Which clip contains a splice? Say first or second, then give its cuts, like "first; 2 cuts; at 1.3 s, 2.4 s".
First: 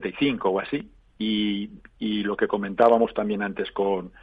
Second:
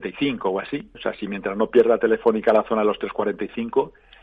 second; 1 cut; at 0.9 s